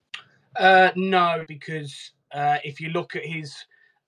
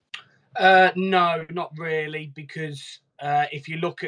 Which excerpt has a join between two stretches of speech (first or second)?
first